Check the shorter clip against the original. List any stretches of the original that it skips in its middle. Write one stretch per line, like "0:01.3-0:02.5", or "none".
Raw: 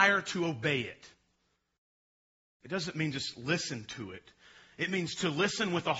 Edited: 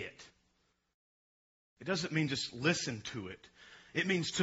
none